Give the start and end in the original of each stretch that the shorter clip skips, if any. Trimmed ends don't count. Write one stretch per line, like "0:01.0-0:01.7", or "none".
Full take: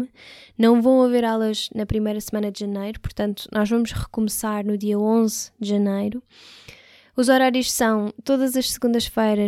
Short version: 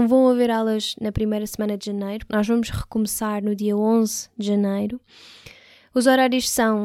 0:03.0-0:03.5